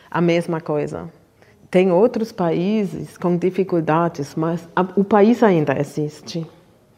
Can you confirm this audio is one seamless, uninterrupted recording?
yes; 0 cuts

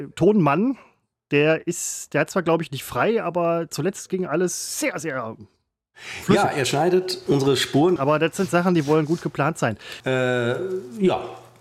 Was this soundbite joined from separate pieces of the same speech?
yes; 2 cuts; at 8.0 s, 10.0 s

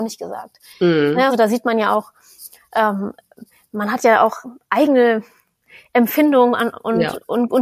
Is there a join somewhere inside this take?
no; 0 cuts

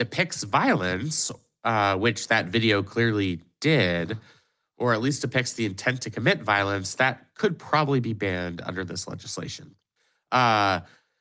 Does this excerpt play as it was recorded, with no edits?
yes; 0 cuts

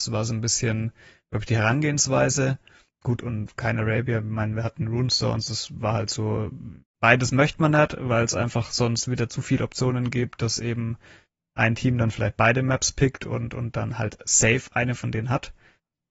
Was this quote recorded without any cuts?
yes; 0 cuts

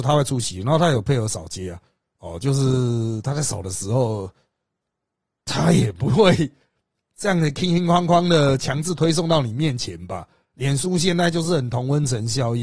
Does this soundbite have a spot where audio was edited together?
no; 0 cuts

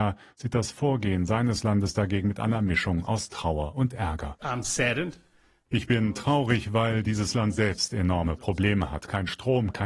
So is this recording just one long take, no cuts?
yes; 0 cuts

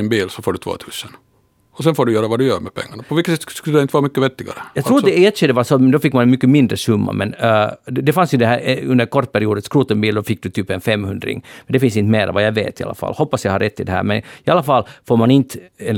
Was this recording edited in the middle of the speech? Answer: no; 0 cuts

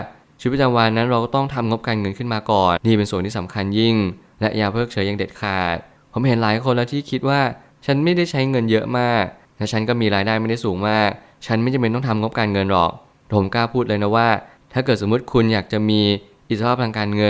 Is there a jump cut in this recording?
yes; 1 cut; at 2.8 s

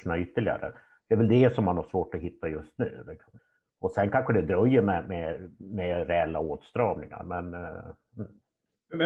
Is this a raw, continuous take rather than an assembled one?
yes; 0 cuts

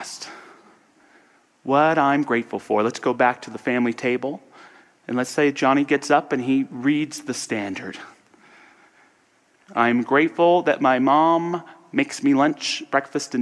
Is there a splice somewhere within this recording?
yes; 1 cut; at 9.7 s

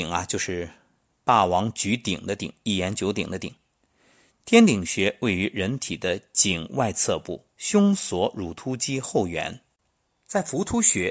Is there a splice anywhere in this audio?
no; 0 cuts

